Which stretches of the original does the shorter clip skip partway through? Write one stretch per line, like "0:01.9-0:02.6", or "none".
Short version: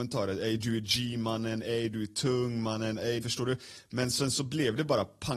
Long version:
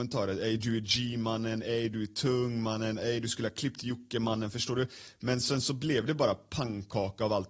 0:03.2-0:04.5